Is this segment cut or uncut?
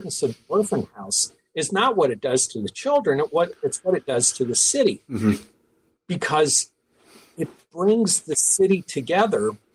uncut